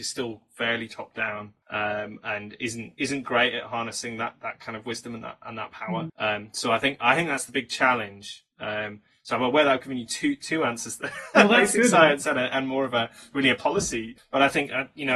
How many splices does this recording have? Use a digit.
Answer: 2